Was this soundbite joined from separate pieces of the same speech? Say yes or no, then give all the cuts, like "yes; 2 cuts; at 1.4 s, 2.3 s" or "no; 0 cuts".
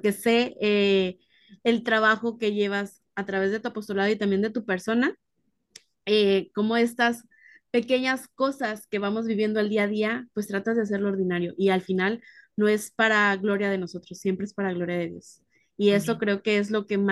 no; 0 cuts